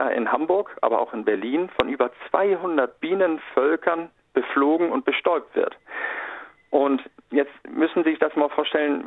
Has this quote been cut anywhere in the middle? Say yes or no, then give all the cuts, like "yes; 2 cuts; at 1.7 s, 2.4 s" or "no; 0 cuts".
no; 0 cuts